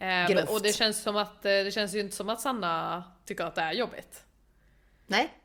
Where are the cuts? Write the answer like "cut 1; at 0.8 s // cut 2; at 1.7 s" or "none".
none